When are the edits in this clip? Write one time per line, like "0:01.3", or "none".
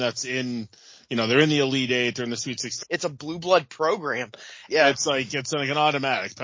0:02.8
0:04.7